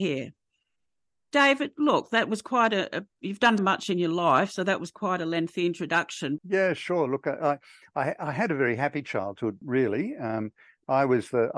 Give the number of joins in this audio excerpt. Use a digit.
3